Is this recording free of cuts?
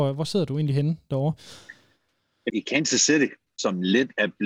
no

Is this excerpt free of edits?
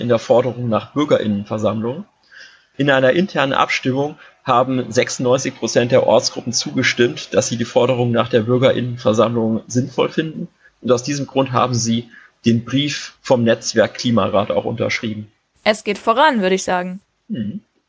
yes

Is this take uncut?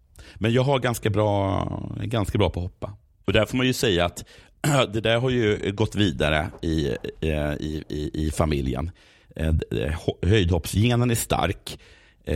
no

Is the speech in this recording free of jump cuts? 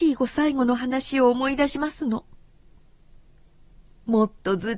no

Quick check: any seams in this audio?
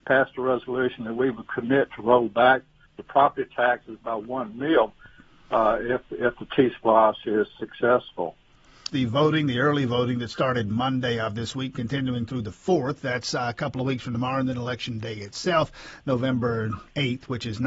yes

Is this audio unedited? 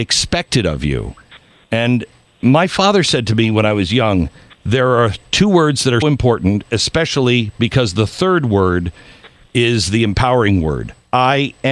no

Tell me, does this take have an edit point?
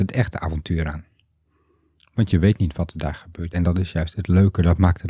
yes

